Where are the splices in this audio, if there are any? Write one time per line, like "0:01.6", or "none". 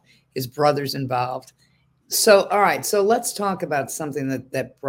0:02.0